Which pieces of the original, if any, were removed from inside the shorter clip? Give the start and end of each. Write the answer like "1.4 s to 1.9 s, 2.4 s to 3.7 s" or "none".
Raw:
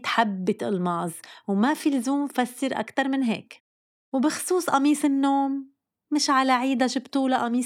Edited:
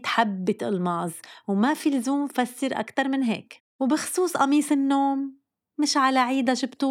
3.7 s to 4.0 s